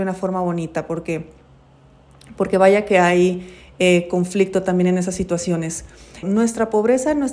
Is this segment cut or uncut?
cut